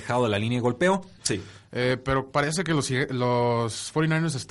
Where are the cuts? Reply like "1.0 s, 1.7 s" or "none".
1.2 s